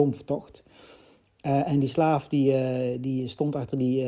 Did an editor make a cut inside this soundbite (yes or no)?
no